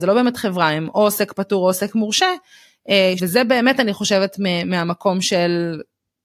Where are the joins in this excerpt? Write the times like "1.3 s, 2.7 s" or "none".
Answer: 3.2 s